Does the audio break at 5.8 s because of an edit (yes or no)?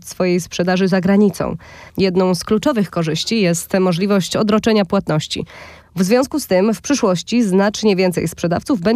yes